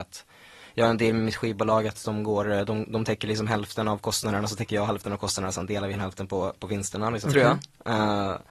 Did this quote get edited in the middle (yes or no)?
yes